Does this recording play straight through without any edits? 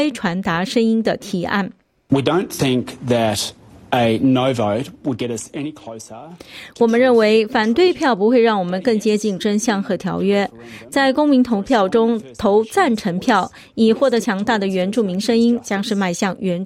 yes; 0 cuts

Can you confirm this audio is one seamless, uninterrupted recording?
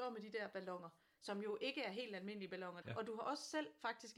no; 1 cut; at 2.8 s

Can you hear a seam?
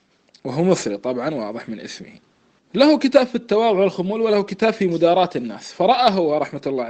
yes; 1 cut; at 2.6 s

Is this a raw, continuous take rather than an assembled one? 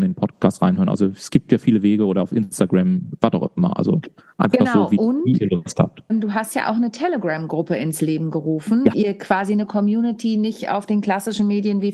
no; 2 cuts; at 6.1 s, 8.9 s

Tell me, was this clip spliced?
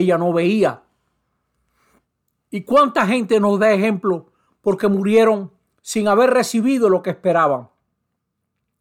no; 0 cuts

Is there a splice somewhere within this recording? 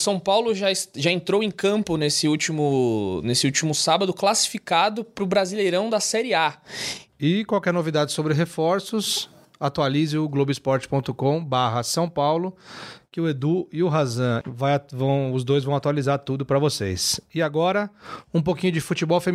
yes; 2 cuts; at 7.1 s, 14.4 s

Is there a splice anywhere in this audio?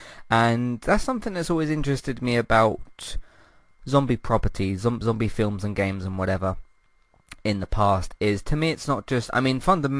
no; 0 cuts

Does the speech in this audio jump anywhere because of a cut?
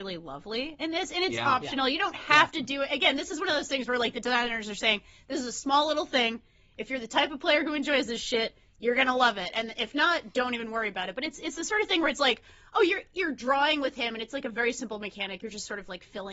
no; 0 cuts

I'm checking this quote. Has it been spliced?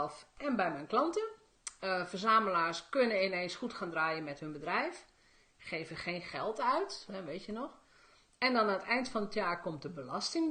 yes; 1 cut; at 7.1 s

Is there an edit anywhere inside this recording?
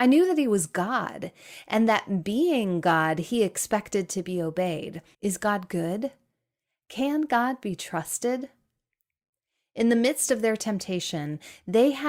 yes; 1 cut; at 5.1 s

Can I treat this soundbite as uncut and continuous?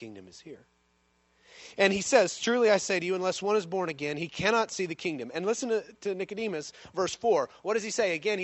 yes; 0 cuts

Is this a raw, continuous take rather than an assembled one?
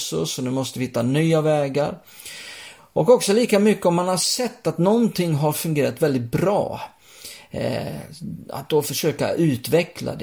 yes; 0 cuts

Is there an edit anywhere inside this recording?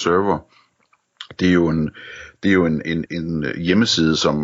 yes; 1 cut; at 3.1 s

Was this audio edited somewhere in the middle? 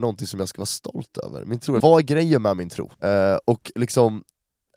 yes; 2 cuts; at 1.8 s, 2.9 s

